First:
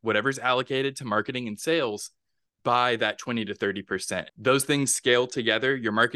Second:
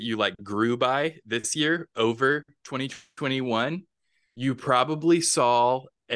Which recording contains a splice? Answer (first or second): first